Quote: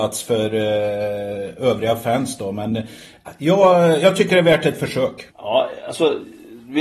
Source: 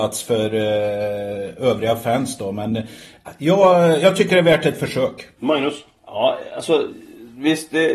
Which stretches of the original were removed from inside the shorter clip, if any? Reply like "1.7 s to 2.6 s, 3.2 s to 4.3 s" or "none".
5.3 s to 6.0 s